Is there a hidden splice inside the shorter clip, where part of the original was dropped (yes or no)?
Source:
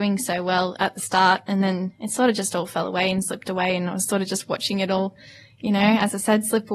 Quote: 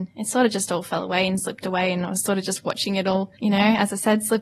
yes